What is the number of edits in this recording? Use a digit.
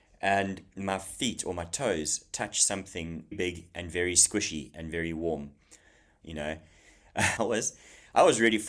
3